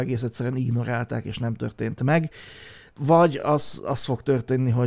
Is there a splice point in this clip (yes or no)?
no